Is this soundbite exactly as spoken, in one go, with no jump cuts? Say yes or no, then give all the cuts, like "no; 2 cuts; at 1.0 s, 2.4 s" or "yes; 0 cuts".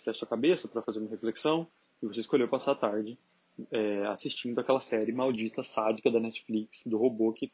no; 1 cut; at 1.8 s